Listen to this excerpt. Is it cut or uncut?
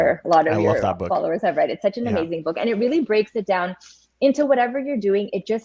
uncut